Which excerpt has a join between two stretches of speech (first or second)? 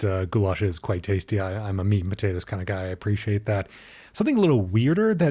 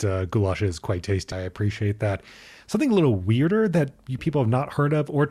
second